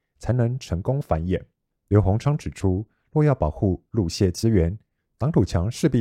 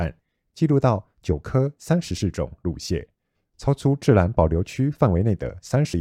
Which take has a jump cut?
first; 1 cut; at 1.7 s

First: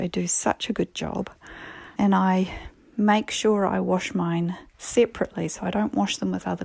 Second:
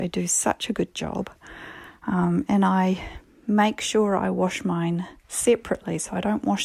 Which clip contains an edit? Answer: first; 1 cut; at 2.0 s

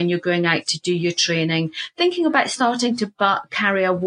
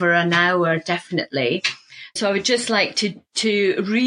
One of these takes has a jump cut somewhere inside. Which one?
second; 1 cut; at 2.2 s

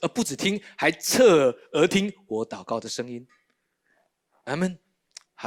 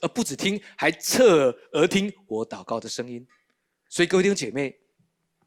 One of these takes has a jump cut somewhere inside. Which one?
second; 1 cut; at 3.9 s

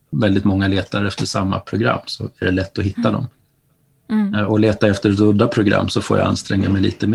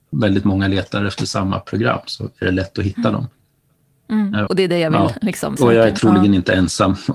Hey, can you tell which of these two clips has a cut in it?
second; 2 cuts; at 4.5 s, 5.6 s

